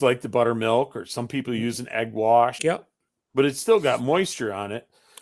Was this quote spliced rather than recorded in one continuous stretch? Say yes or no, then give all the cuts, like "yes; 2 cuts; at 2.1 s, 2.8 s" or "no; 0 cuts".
yes; 1 cut; at 2.6 s